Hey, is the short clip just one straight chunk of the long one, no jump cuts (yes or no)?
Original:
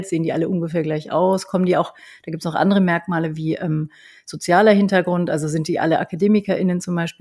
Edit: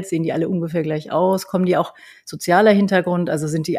no